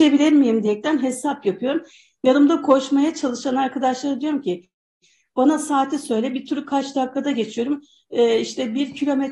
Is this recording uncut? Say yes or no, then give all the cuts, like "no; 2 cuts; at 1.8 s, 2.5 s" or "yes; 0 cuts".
yes; 0 cuts